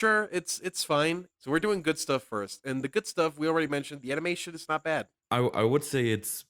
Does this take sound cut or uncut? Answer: cut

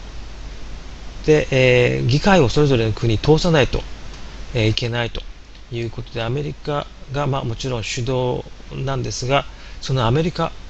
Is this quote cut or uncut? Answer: cut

